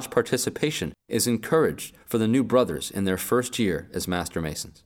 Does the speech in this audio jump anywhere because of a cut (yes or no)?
no